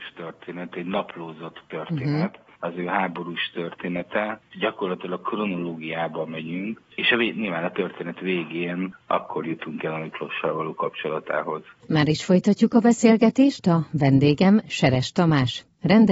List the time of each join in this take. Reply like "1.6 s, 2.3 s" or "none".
6.8 s, 11.8 s

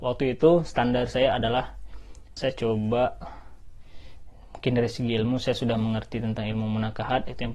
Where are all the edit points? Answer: 2.4 s

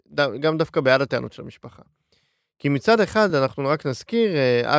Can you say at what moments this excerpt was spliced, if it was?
none

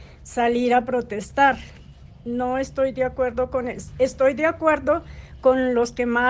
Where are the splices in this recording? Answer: none

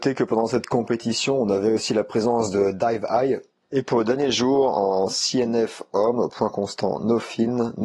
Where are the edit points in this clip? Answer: 3.6 s

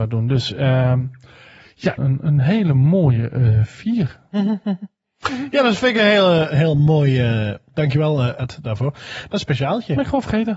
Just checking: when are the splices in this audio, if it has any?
2.0 s, 7.7 s, 9.3 s

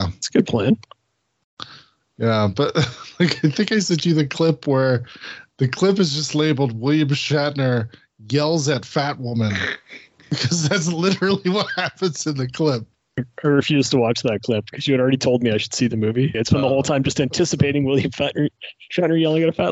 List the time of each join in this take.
16.3 s

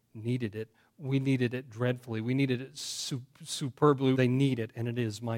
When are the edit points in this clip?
4.1 s

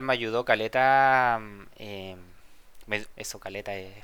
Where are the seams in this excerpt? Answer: 3.1 s

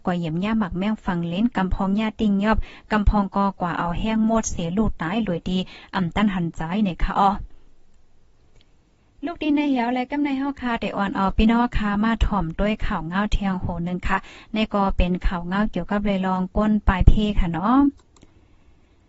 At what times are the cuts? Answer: none

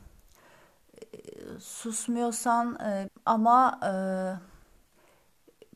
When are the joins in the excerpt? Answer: 3.1 s

